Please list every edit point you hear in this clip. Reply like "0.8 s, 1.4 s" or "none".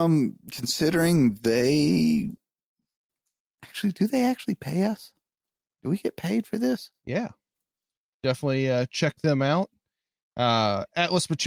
7.0 s